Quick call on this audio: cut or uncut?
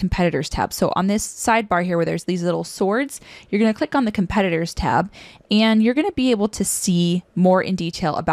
uncut